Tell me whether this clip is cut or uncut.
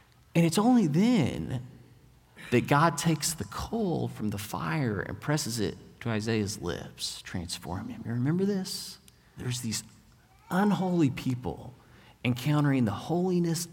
cut